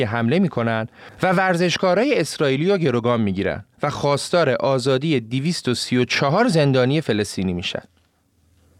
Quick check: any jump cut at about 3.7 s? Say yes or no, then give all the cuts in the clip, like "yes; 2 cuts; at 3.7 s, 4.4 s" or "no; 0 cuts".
yes; 1 cut; at 3.7 s